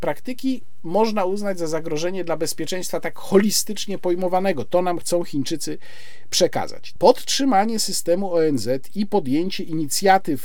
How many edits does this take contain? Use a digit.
1